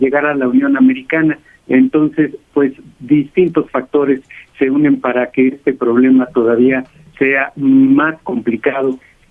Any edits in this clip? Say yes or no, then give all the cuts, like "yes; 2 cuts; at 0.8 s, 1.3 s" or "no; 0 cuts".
no; 0 cuts